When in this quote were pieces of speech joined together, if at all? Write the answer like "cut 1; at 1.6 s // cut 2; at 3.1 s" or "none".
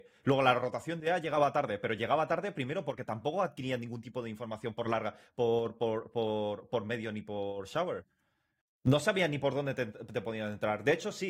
none